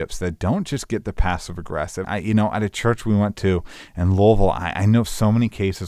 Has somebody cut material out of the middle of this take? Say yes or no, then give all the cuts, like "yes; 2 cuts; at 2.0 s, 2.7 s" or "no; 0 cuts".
yes; 1 cut; at 2.0 s